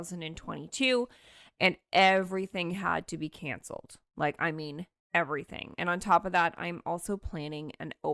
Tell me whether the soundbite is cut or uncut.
uncut